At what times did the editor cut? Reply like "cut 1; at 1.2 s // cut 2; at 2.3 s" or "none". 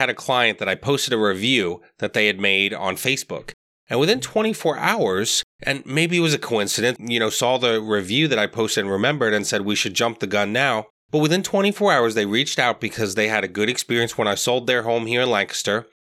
cut 1; at 7.0 s